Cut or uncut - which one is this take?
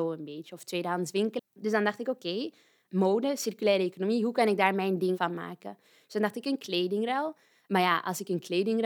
cut